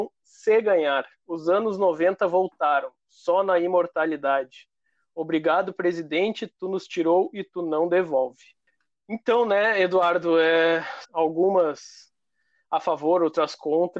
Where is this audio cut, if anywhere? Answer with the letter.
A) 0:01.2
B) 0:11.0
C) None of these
B